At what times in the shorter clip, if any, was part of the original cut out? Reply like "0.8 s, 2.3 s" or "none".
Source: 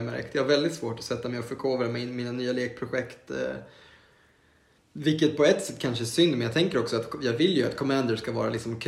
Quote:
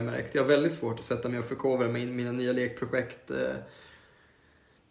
none